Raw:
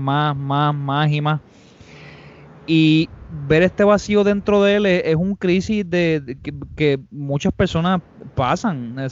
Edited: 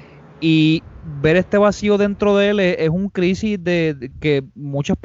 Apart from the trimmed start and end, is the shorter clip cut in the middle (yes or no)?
yes